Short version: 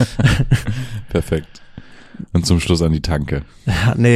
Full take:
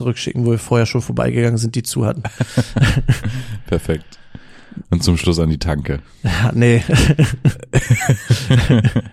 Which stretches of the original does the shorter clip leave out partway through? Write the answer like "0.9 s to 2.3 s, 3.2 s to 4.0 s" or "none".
none